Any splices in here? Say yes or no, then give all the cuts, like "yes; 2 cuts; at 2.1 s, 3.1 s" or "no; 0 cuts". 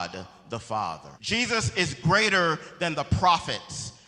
yes; 1 cut; at 1.1 s